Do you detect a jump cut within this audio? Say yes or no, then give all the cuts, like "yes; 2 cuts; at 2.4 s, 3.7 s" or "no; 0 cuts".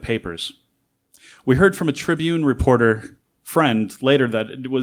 no; 0 cuts